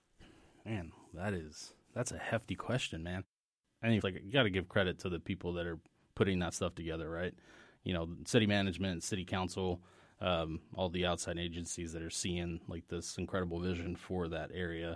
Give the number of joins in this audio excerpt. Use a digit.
1